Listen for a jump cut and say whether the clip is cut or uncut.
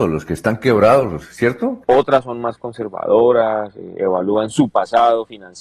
cut